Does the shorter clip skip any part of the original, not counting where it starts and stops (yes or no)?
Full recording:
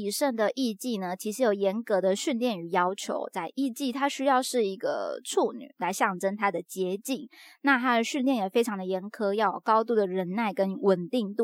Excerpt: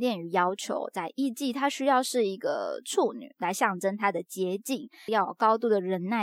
yes